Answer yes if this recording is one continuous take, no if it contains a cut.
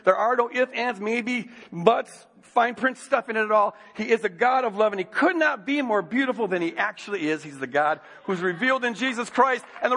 yes